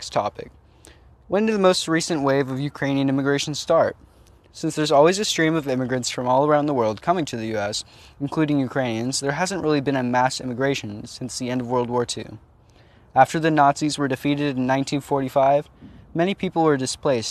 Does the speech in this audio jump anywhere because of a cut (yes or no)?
no